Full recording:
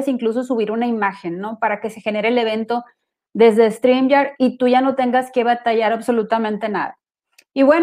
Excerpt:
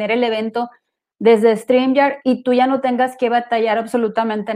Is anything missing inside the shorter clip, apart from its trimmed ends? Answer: no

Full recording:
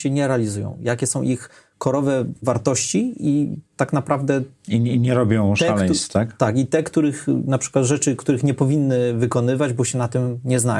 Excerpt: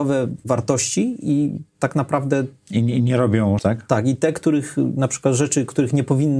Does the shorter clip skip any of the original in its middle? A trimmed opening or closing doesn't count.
yes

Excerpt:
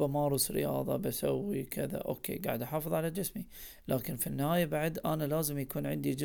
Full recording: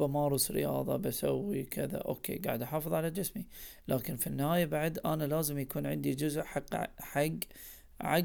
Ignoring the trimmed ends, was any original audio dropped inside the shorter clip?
no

